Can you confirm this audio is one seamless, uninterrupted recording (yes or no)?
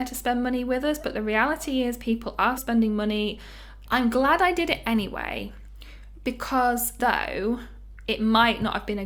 no